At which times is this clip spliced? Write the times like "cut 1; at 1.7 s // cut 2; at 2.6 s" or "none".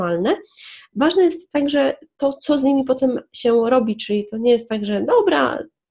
none

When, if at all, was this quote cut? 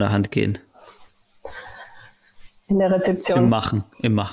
cut 1; at 2.6 s

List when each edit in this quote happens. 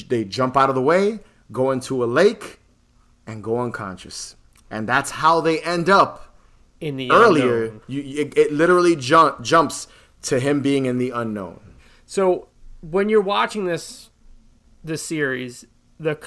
none

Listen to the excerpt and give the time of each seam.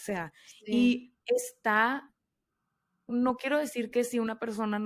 cut 1; at 3.1 s

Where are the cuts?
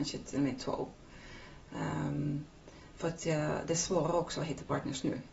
none

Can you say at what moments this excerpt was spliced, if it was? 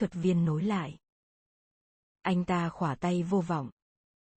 none

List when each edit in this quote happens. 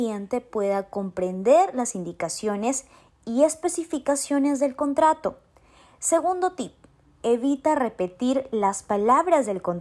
none

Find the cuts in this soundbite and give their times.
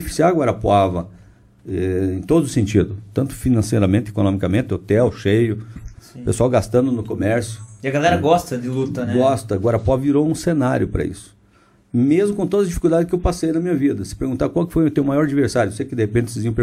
none

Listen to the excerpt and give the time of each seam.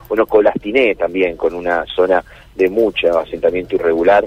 none

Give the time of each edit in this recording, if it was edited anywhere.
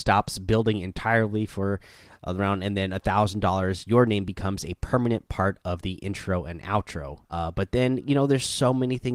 cut 1; at 7.3 s

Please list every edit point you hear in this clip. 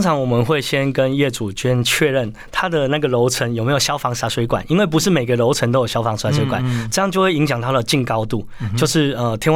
none

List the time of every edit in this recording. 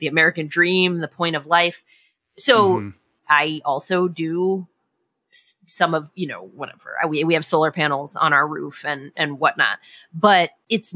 cut 1; at 3.2 s

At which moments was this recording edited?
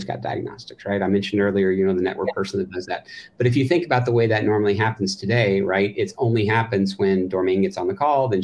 none

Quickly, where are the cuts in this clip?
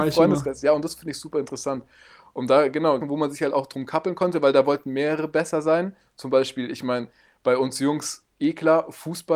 cut 1; at 3.0 s

